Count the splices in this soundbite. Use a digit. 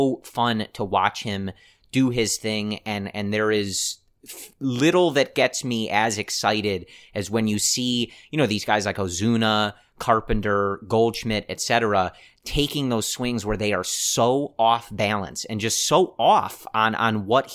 0